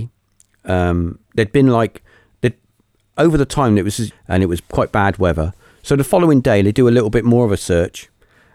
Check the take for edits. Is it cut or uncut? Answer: cut